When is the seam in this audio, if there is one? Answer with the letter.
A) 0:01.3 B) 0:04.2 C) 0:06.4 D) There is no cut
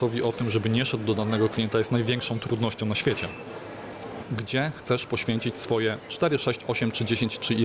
B